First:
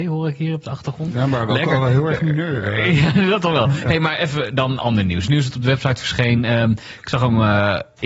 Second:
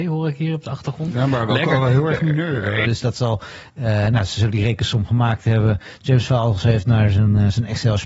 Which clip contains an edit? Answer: second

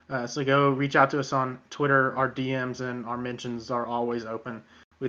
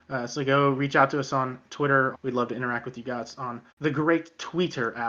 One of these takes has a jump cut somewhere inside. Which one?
second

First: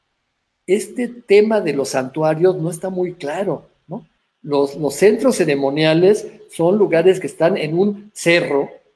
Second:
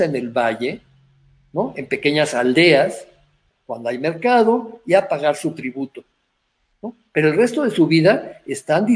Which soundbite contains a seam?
second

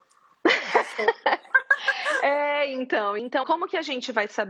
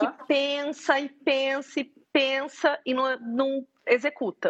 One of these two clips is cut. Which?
first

